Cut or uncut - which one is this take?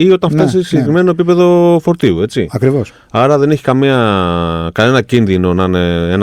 uncut